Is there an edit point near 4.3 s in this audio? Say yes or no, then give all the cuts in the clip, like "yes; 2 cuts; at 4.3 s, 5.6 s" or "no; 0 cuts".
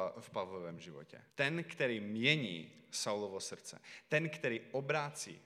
no; 1 cut; at 1.3 s